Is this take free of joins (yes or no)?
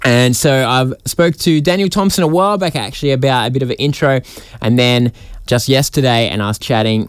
no